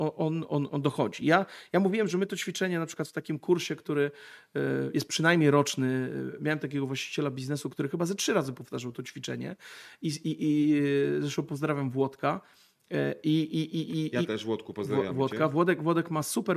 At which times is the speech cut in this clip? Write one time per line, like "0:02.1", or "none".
none